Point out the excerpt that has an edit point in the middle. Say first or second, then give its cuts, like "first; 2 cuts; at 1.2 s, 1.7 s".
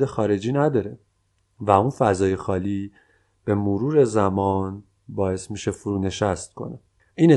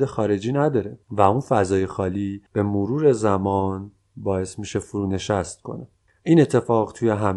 second; 2 cuts; at 1.0 s, 2.5 s